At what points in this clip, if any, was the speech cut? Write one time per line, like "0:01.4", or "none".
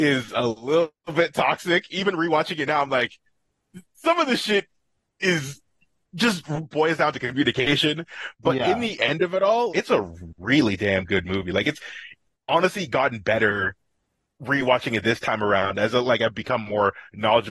0:09.7